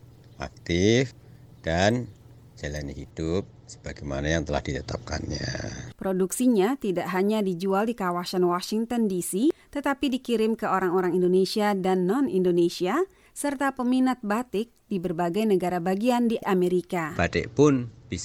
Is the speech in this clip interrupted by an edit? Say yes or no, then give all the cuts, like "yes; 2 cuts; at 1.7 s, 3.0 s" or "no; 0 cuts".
yes; 1 cut; at 5.9 s